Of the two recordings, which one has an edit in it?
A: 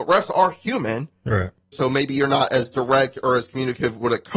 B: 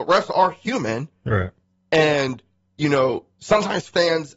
A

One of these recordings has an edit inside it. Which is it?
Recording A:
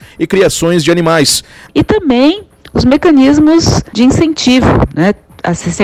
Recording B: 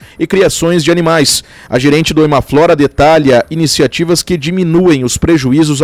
A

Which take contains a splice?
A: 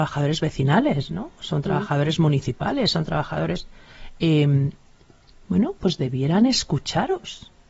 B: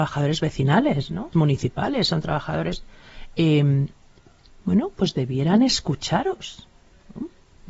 B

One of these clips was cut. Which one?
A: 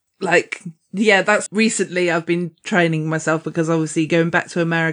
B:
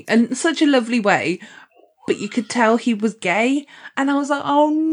A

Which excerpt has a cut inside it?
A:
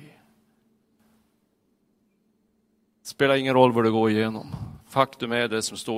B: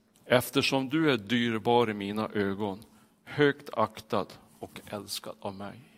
A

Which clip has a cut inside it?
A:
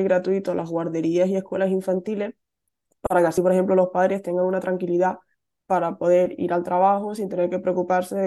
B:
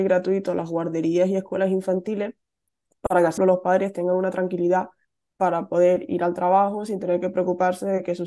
B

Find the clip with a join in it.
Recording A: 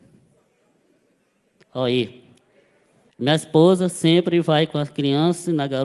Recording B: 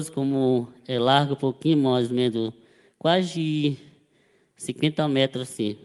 A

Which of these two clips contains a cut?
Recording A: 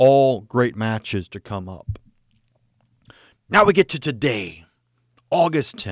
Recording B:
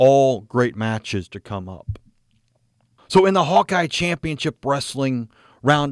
B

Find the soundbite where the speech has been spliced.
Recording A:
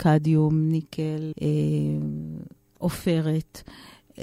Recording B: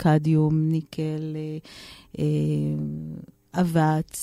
A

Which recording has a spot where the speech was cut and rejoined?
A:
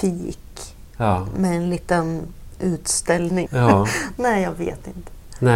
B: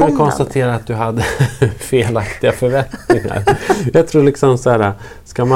A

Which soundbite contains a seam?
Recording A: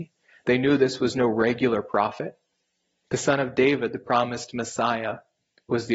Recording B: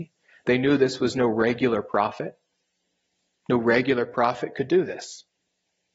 A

